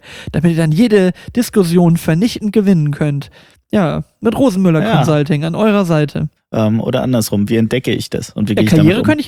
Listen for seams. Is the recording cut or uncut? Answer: cut